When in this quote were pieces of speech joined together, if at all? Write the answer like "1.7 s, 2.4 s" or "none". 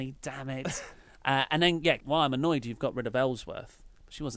2.0 s